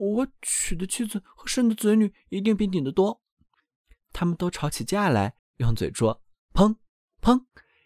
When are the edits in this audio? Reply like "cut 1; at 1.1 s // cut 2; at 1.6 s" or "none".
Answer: cut 1; at 3.5 s // cut 2; at 5.4 s

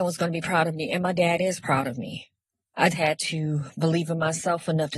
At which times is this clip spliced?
cut 1; at 2.9 s

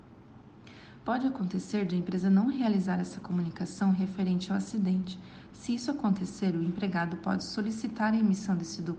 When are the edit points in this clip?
none

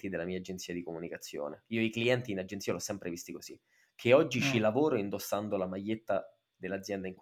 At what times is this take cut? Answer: none

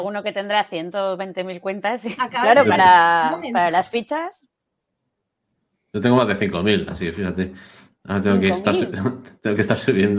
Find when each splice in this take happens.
cut 1; at 2.2 s

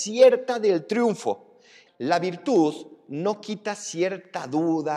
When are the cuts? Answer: cut 1; at 1.9 s

